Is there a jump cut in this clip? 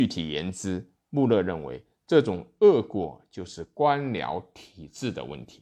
no; 0 cuts

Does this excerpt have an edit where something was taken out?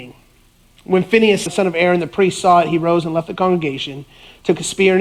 yes; 1 cut; at 1.5 s

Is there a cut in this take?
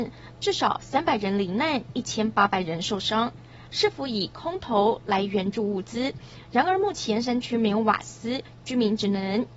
yes; 1 cut; at 3.7 s

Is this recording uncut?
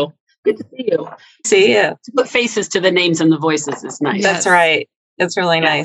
no; 1 cut; at 1.4 s

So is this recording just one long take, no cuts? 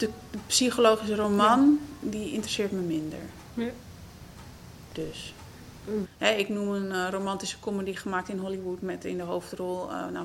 no; 1 cut; at 6.0 s

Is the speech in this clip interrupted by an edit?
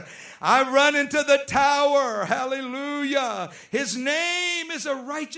no; 0 cuts

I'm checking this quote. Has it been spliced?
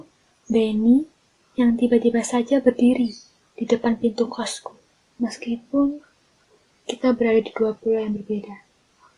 yes; 1 cut; at 5.1 s

